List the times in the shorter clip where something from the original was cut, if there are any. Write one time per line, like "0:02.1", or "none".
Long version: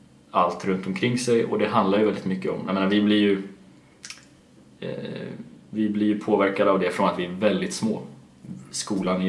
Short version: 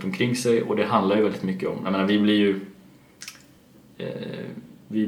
none